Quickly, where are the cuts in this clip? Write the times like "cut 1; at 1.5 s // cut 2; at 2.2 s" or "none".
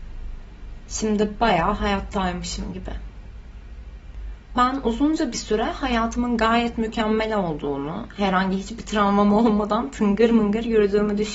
none